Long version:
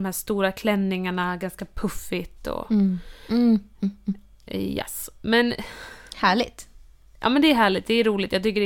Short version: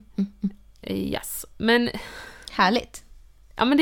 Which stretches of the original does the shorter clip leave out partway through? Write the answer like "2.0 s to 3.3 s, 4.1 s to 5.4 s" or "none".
none